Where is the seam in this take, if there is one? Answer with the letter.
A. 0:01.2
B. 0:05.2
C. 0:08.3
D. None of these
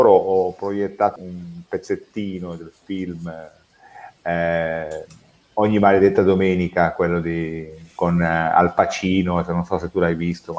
A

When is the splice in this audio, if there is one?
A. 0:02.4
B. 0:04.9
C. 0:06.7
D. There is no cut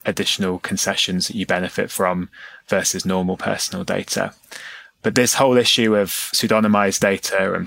D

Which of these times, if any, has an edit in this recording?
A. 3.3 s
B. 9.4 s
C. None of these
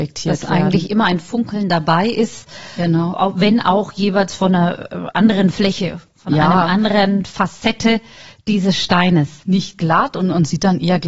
B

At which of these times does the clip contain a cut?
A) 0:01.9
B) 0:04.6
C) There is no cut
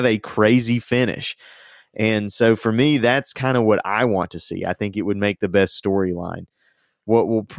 C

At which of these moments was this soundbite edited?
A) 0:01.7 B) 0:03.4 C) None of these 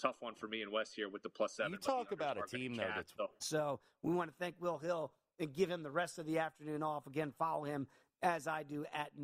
B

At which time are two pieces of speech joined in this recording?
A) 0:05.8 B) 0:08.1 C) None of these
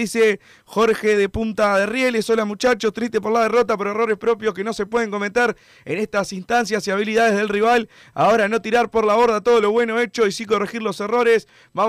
C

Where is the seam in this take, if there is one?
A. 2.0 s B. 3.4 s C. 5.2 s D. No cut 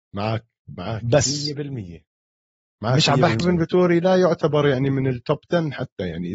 B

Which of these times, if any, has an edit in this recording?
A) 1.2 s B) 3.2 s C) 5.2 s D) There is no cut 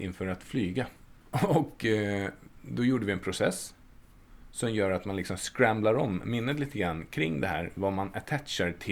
A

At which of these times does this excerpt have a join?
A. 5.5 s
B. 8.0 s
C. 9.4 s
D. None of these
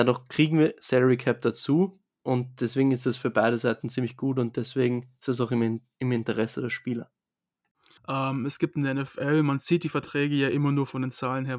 B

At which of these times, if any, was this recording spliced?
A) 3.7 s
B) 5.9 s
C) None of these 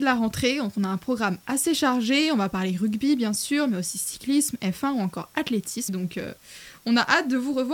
B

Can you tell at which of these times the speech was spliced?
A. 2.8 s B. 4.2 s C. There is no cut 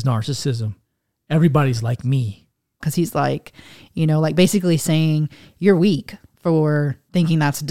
A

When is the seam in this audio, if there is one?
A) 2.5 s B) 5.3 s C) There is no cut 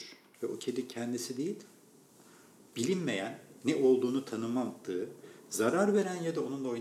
C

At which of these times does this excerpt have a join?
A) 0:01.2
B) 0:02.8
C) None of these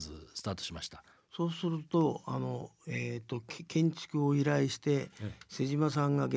A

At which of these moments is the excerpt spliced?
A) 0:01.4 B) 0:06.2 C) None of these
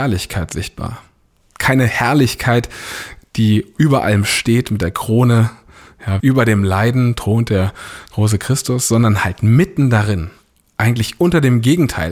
B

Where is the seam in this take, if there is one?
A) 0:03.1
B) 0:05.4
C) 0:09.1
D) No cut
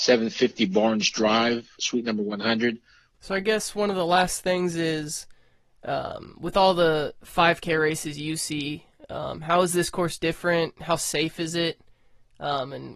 A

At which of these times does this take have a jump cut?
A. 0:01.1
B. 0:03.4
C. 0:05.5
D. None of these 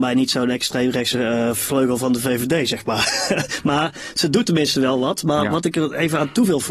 D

